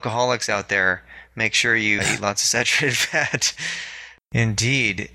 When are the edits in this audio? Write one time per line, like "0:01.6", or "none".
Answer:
0:02.0
0:04.2